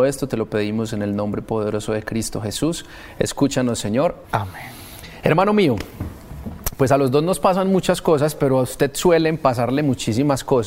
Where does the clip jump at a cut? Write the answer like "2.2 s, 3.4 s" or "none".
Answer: 4.2 s